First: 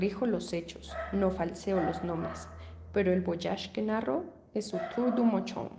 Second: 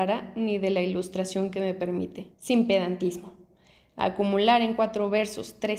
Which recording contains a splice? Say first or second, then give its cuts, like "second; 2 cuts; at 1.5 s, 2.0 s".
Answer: second; 1 cut; at 2.3 s